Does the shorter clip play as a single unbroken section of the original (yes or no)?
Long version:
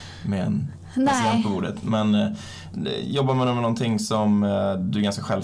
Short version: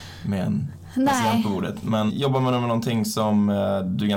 no